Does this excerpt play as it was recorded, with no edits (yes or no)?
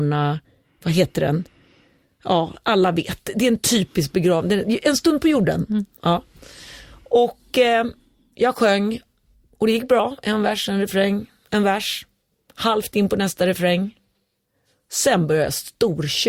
yes